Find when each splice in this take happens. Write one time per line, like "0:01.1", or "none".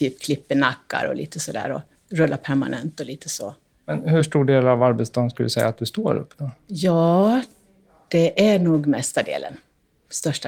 none